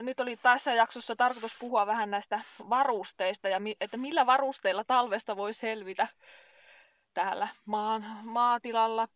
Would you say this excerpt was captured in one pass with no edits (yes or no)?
yes